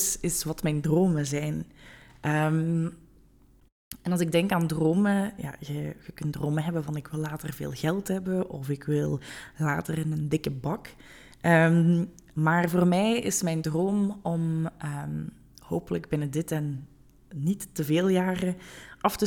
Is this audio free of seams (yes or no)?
yes